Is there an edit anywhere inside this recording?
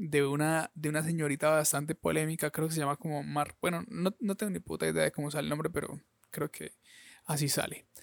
no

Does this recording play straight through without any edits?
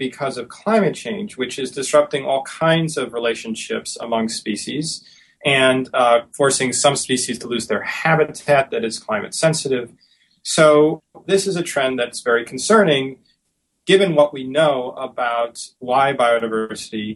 no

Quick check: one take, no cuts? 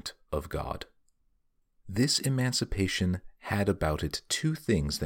yes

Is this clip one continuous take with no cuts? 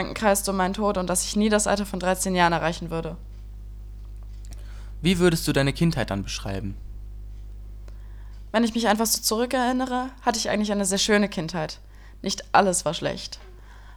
yes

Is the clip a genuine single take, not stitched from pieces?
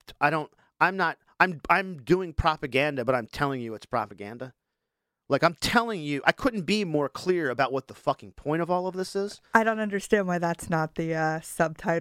yes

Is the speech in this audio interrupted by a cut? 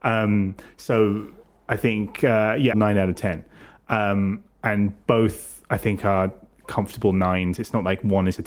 yes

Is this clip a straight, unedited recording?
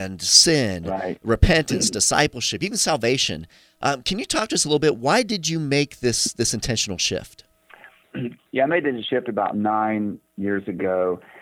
no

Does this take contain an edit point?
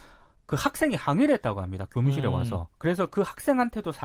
no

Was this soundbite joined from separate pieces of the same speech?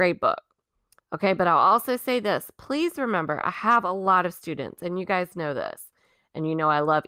yes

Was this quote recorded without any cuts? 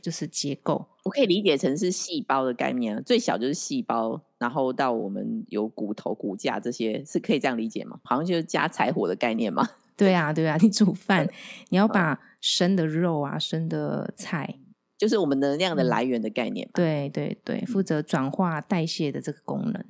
no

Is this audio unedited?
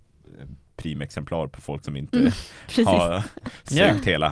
yes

